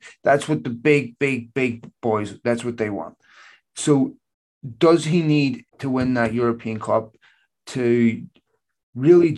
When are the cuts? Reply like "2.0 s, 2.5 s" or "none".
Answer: 5.7 s